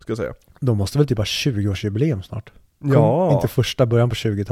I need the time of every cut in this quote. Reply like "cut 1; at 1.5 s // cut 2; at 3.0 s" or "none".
none